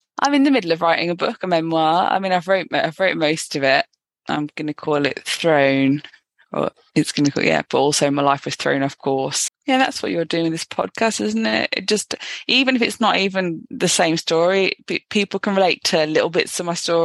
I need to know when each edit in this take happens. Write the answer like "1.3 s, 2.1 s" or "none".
7.7 s, 9.5 s